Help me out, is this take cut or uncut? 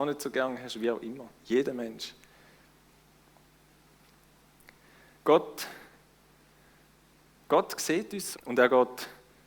cut